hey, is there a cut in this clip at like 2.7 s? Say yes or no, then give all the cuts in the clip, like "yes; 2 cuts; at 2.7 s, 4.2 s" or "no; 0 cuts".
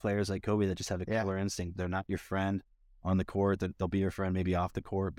no; 0 cuts